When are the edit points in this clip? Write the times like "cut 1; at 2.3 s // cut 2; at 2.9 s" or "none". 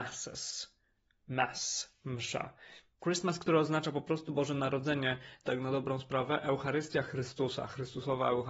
cut 1; at 3.0 s // cut 2; at 5.4 s

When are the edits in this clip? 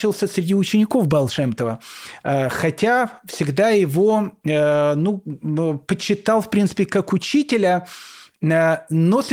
none

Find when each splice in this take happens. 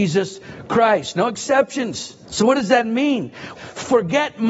cut 1; at 2.3 s // cut 2; at 3.5 s

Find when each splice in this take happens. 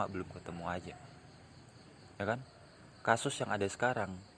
cut 1; at 2.1 s

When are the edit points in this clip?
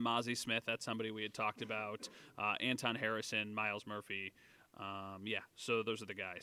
none

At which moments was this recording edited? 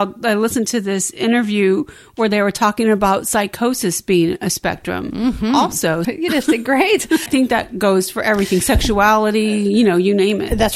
cut 1; at 6.0 s // cut 2; at 7.3 s

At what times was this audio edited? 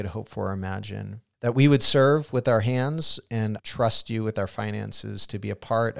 cut 1; at 1.3 s // cut 2; at 3.6 s

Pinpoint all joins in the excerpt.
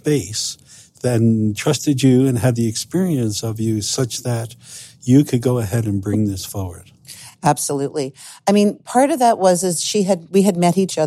none

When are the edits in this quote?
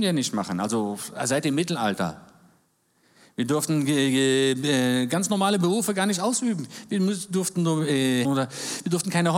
cut 1; at 8.2 s

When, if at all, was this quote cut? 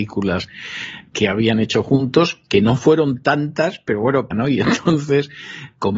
cut 1; at 4.3 s

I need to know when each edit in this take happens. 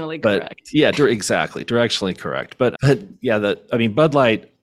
none

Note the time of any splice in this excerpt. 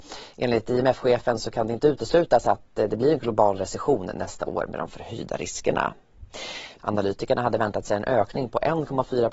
cut 1; at 6.8 s

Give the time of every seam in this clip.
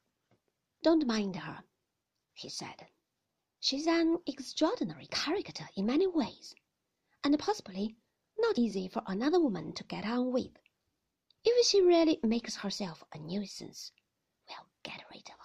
cut 1; at 8.5 s // cut 2; at 11.3 s

